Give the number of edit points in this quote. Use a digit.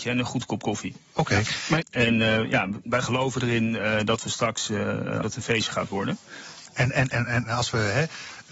3